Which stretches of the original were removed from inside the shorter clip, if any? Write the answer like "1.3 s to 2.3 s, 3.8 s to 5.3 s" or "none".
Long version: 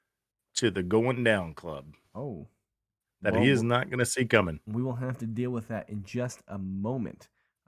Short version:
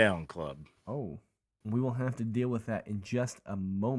2.9 s to 4.6 s